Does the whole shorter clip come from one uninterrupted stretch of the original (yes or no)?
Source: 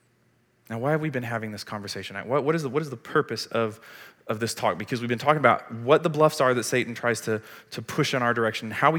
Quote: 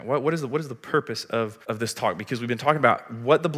no